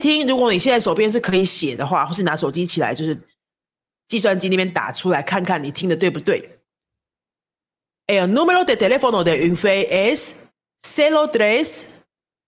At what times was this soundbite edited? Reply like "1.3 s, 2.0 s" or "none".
none